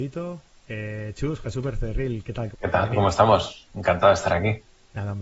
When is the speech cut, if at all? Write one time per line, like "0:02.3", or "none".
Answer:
0:02.5
0:03.7